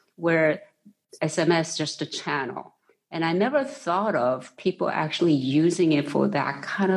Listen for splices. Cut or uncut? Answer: uncut